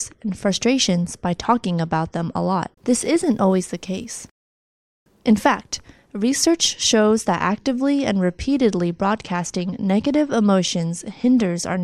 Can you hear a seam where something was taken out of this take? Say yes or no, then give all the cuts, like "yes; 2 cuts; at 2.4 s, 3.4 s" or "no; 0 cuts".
yes; 1 cut; at 2.7 s